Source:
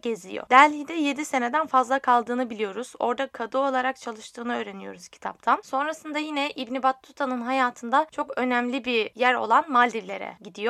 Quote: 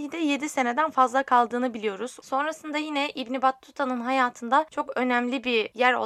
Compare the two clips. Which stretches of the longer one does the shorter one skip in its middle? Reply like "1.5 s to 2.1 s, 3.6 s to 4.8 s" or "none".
3.0 s to 5.6 s